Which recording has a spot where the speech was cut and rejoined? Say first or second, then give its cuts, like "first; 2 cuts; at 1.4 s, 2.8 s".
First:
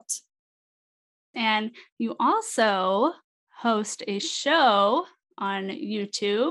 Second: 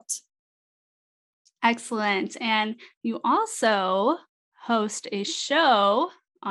first; 1 cut; at 1.3 s